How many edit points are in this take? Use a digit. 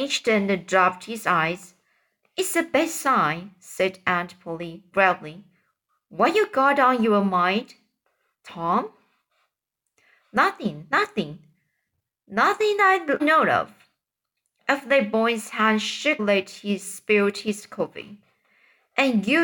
2